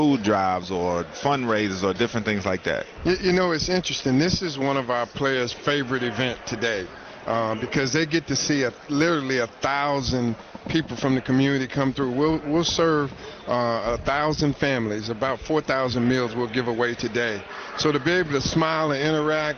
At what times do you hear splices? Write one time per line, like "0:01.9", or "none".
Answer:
none

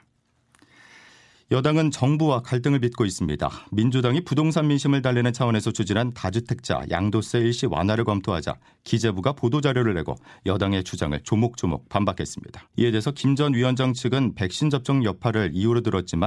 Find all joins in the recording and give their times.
0:12.7

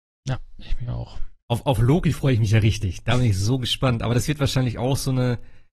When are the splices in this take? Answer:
0:01.4

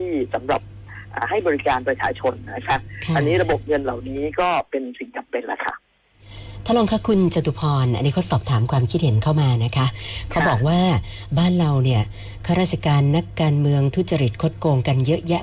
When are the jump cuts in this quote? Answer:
none

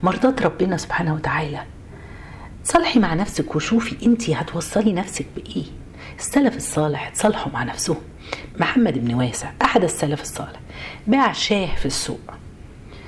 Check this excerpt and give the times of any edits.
0:08.5

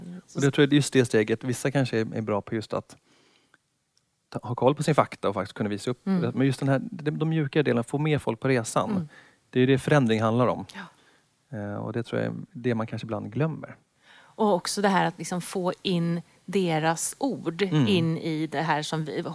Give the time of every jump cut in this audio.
none

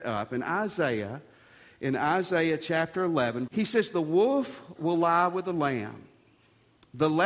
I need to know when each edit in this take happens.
0:03.5

